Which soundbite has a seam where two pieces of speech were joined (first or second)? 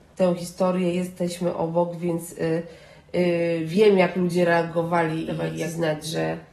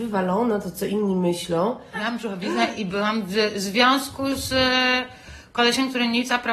second